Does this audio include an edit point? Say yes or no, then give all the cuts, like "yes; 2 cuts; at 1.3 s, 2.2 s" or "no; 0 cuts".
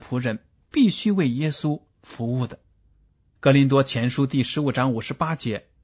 yes; 1 cut; at 3.3 s